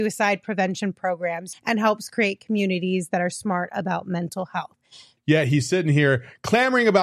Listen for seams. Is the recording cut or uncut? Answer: cut